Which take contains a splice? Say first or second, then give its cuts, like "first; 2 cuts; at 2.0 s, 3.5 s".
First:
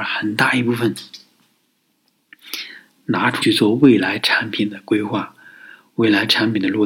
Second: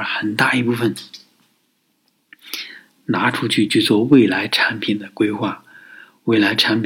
first; 1 cut; at 3.4 s